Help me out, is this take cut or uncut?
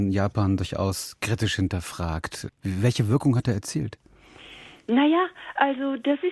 uncut